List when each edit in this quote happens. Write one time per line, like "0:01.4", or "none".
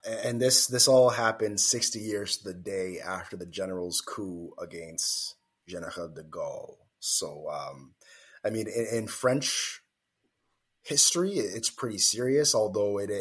none